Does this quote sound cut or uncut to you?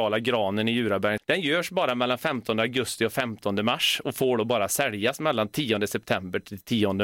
uncut